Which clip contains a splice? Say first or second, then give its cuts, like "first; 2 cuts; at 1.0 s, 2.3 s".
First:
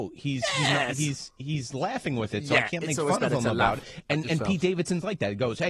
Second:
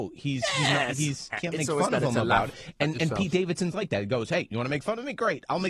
second; 1 cut; at 1.3 s